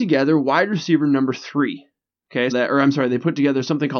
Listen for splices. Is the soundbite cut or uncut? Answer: cut